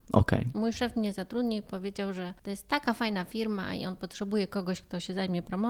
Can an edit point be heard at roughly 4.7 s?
no; 1 cut; at 2.4 s

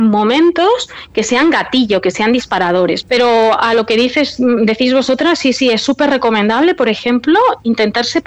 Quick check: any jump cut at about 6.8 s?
no; 1 cut; at 3.0 s

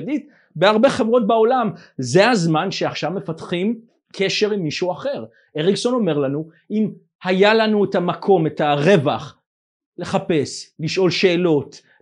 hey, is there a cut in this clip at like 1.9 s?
no; 0 cuts

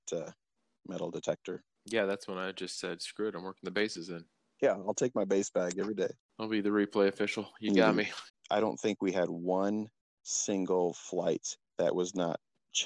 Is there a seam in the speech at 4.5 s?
no; 1 cut; at 8.3 s

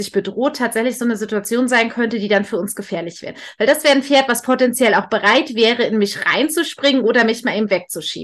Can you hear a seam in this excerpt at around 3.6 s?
no; 0 cuts

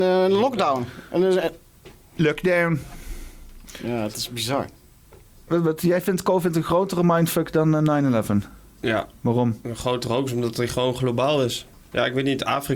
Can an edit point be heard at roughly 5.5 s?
yes; 1 cut; at 5.5 s

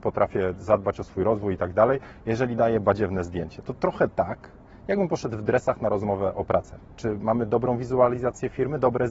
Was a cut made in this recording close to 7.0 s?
yes; 1 cut; at 7.0 s

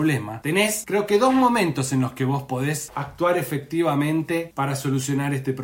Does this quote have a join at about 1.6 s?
no; 0 cuts

